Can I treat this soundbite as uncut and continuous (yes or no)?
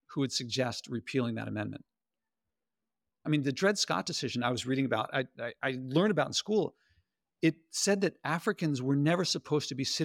no